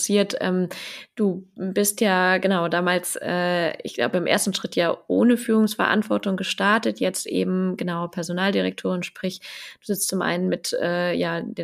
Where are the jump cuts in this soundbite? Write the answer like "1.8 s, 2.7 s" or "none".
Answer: none